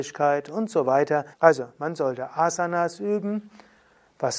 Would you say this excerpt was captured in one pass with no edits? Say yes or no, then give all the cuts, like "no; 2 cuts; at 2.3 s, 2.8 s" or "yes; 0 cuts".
no; 1 cut; at 1.3 s